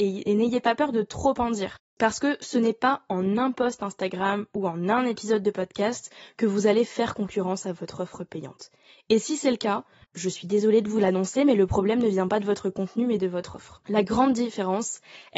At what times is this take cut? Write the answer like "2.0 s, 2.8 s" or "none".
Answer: none